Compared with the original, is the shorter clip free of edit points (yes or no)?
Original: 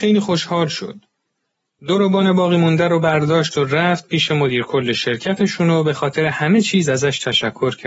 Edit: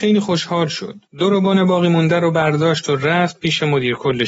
no